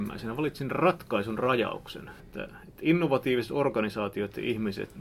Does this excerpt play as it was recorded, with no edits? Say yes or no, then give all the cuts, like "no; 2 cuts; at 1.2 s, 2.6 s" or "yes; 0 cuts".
no; 1 cut; at 2.2 s